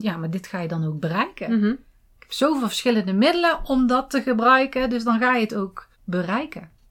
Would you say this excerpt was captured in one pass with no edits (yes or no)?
no